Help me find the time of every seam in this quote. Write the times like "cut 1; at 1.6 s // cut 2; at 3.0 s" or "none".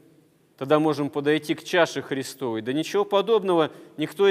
none